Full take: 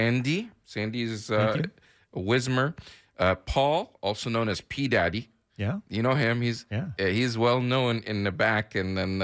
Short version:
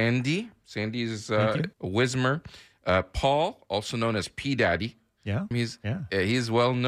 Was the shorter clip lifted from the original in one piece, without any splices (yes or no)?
no